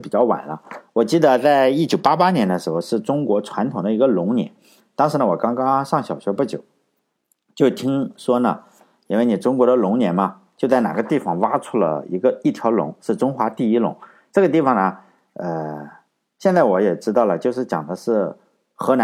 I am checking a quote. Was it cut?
no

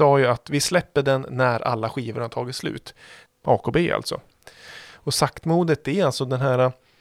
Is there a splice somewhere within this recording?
yes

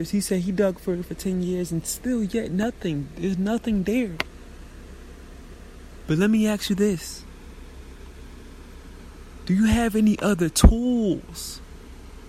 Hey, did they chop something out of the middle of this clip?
no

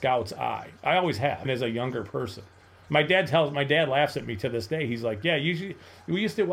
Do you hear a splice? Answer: yes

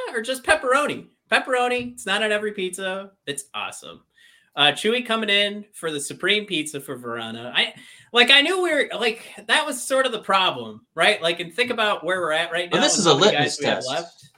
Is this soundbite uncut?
no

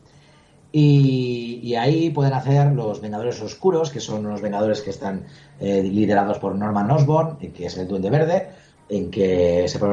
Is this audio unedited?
no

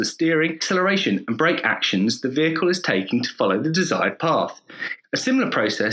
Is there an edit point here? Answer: yes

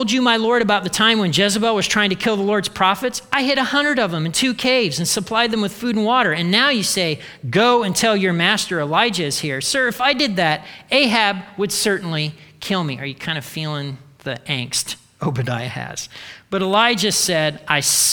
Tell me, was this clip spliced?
no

